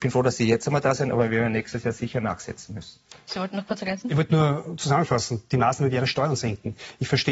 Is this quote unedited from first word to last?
yes; 0 cuts

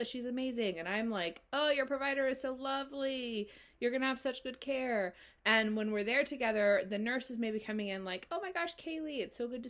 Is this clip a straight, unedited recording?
yes; 0 cuts

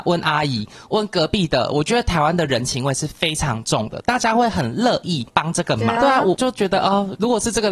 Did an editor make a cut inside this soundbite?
yes; 1 cut; at 6.0 s

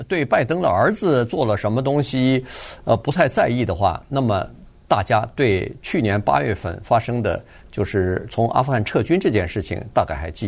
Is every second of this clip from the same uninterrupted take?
yes; 0 cuts

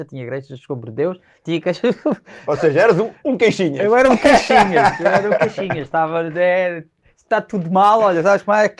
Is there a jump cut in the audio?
no; 0 cuts

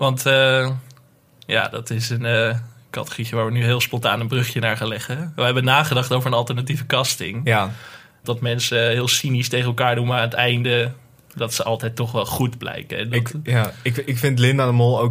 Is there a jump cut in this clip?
yes; 1 cut; at 8.2 s

